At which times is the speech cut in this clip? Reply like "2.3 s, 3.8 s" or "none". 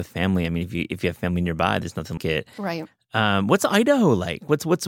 2.2 s